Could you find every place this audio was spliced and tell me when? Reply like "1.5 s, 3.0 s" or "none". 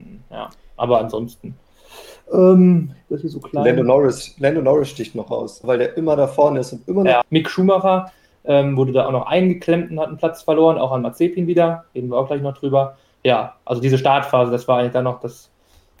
5.6 s, 7.2 s